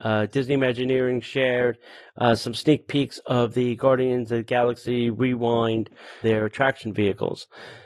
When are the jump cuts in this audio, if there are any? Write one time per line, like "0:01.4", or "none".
0:06.2